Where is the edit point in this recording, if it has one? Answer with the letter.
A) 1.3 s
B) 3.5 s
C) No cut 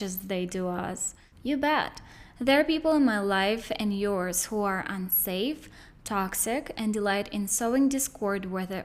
A